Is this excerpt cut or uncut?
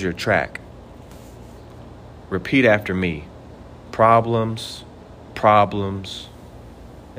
uncut